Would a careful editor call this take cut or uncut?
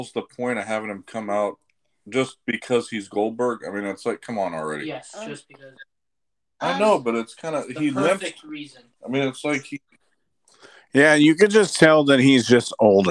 cut